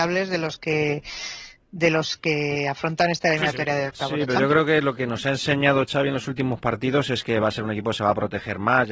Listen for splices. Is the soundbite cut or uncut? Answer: uncut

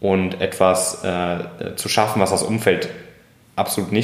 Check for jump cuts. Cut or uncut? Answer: uncut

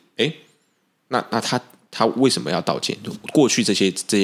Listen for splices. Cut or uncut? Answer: uncut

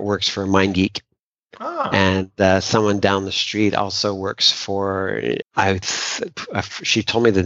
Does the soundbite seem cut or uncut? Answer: cut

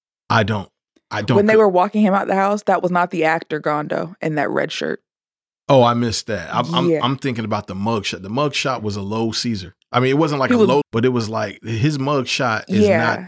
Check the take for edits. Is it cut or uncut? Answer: cut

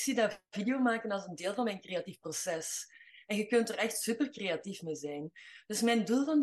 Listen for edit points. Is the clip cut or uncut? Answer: uncut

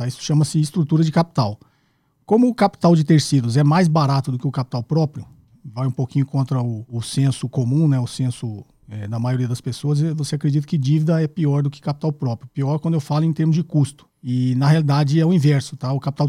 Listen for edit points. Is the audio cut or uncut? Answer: uncut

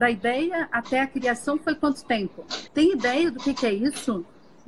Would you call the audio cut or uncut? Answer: cut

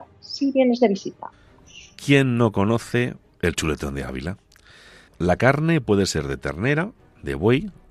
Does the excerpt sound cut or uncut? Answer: cut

